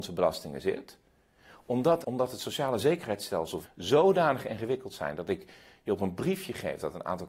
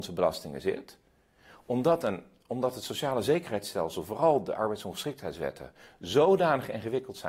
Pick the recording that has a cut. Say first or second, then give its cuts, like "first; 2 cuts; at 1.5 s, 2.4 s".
first; 2 cuts; at 2.0 s, 3.6 s